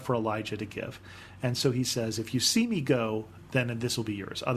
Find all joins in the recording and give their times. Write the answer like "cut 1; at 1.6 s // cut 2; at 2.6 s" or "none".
none